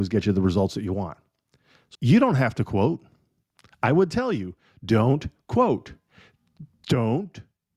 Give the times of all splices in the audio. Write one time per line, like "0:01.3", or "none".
0:02.0